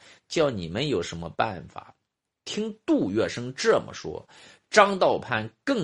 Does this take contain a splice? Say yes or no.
no